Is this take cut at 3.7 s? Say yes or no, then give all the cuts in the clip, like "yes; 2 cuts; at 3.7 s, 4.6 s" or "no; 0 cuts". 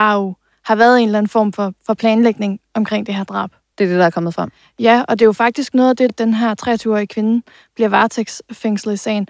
yes; 2 cuts; at 3.7 s, 6.1 s